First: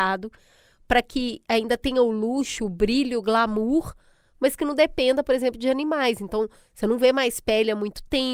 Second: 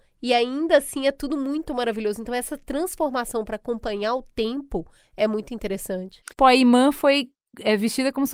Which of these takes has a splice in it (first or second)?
second